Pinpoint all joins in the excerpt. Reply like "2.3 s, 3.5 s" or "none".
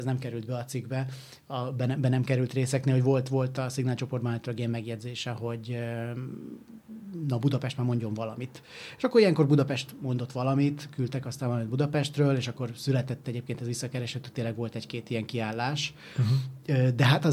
none